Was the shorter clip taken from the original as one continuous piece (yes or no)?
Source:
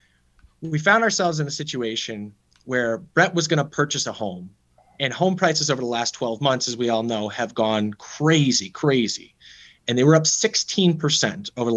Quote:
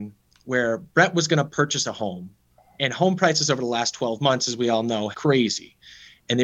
no